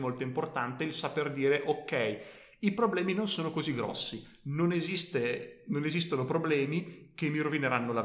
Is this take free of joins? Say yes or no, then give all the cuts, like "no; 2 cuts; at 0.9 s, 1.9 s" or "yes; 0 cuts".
yes; 0 cuts